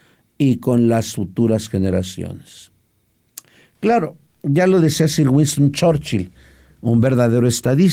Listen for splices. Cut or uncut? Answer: uncut